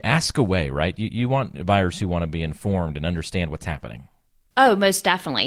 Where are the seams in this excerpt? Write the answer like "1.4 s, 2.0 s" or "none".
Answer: none

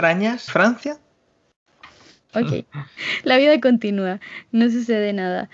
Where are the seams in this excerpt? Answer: 2.3 s

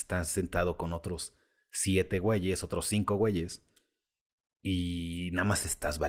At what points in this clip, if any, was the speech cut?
none

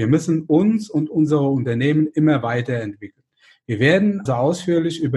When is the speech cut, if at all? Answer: 4.3 s

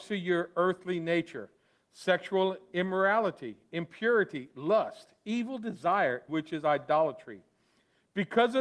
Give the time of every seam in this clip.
6.3 s

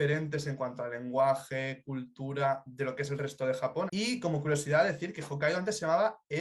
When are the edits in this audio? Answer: 3.9 s

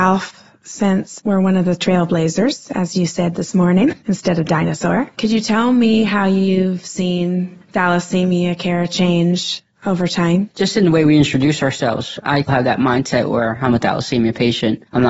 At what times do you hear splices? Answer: 12.5 s

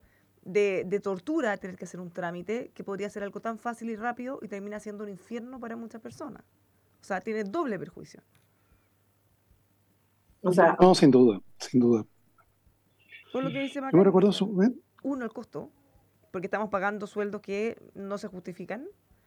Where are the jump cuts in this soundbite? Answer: 13.2 s, 15.0 s

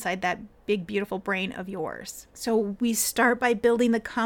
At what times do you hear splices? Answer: none

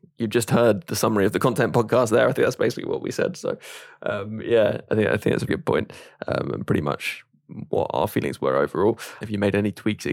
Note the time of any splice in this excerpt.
5.5 s, 9.2 s

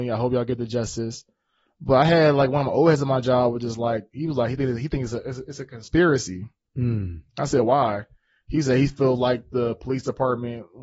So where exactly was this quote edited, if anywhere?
none

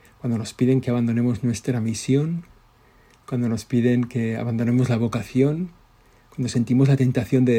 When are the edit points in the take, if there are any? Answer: none

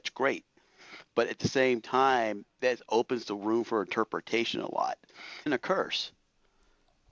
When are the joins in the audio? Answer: 5.5 s

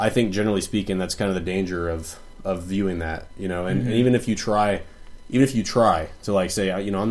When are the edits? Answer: none

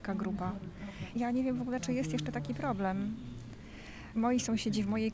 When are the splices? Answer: none

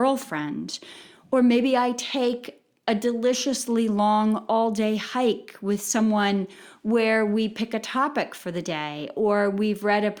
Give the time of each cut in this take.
none

